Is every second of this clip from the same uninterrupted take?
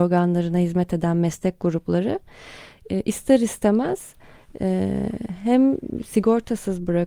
yes; 0 cuts

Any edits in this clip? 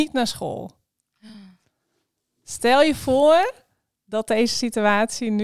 no; 0 cuts

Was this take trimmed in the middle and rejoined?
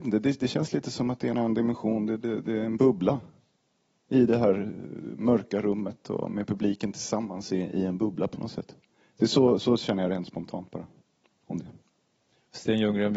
no; 0 cuts

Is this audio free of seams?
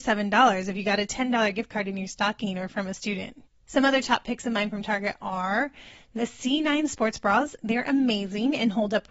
yes; 0 cuts

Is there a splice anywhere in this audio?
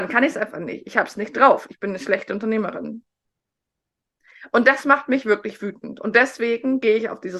no; 0 cuts

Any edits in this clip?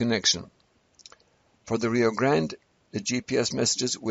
yes; 1 cut; at 2.8 s

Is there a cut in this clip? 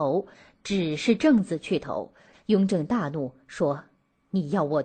yes; 1 cut; at 2.3 s

